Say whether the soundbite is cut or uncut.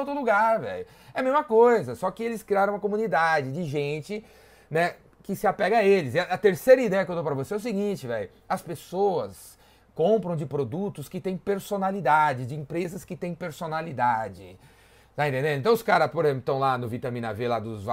uncut